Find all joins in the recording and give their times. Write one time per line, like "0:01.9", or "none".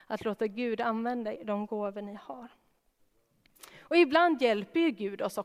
0:01.3